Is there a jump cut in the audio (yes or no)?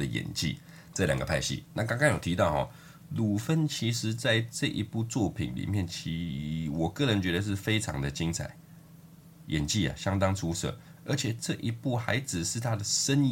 yes